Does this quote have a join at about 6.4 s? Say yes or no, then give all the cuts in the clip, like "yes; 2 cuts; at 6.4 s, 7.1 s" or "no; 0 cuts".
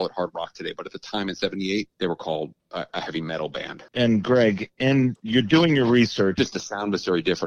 yes; 3 cuts; at 1.9 s, 3.9 s, 6.4 s